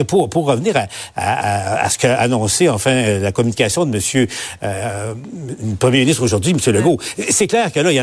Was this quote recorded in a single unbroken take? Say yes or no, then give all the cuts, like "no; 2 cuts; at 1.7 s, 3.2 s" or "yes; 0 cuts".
yes; 0 cuts